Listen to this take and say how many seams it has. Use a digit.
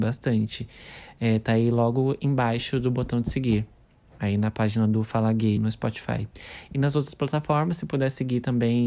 1